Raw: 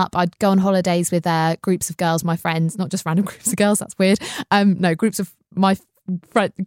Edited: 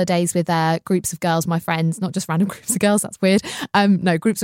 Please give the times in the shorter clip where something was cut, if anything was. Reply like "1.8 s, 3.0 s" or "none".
none

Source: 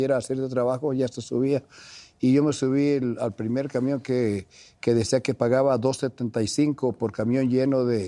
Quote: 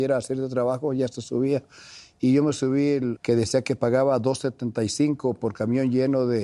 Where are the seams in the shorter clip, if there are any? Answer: 3.2 s

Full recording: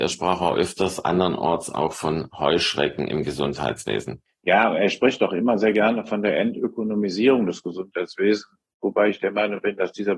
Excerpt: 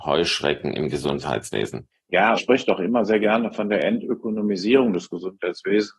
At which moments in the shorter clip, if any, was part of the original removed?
2.4 s

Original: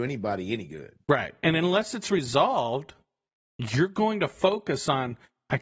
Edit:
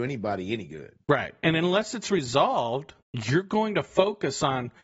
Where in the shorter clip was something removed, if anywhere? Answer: 3.0 s

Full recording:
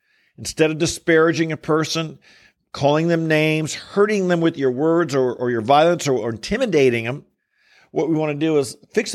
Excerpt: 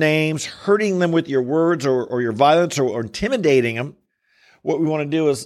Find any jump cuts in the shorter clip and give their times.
none

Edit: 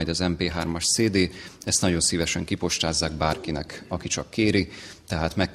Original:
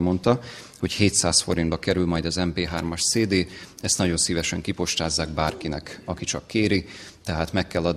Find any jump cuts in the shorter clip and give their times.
none

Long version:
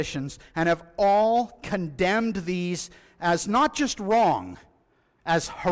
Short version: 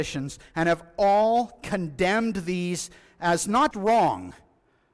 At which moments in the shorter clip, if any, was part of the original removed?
3.7 s

